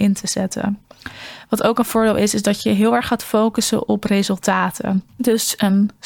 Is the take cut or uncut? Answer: uncut